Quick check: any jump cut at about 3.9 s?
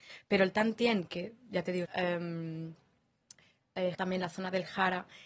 yes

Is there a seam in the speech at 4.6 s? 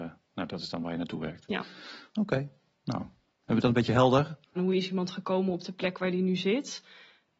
yes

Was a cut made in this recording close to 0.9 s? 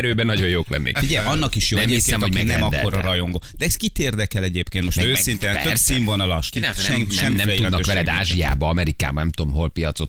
no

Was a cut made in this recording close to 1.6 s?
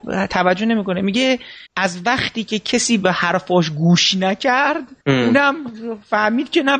yes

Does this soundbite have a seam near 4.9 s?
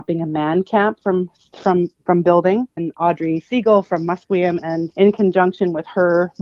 yes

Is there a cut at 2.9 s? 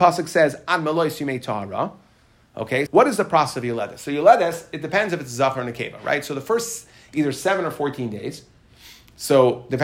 yes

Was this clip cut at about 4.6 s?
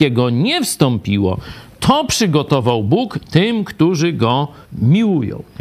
yes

